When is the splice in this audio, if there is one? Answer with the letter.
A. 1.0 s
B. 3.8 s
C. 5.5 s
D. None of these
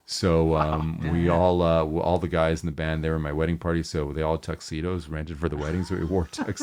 D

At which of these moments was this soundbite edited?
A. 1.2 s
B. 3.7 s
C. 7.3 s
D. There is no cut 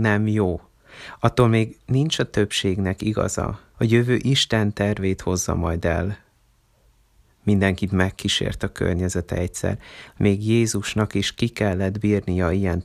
B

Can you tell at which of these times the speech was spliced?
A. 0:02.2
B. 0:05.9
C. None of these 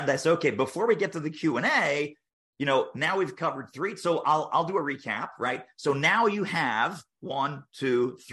C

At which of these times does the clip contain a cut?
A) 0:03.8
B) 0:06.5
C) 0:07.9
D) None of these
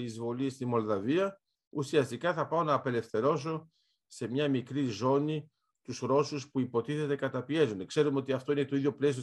D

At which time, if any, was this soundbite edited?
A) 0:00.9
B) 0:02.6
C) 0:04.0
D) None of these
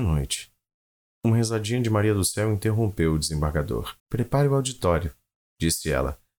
C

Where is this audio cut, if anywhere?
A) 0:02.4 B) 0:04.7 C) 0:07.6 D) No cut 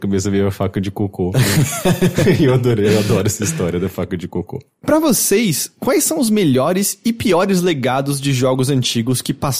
D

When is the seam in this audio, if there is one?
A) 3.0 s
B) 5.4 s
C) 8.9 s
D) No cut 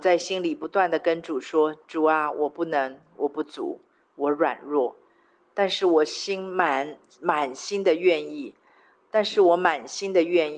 D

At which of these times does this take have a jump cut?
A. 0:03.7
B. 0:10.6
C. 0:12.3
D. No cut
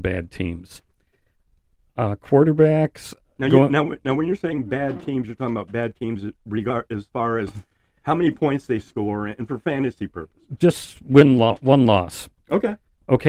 D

